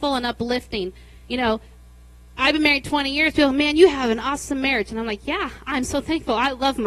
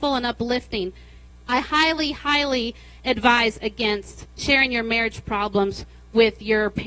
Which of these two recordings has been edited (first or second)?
second